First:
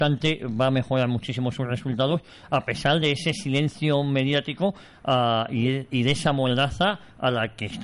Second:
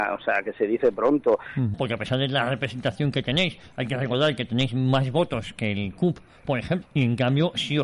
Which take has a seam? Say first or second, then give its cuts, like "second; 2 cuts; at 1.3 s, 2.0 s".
second; 2 cuts; at 1.7 s, 6.8 s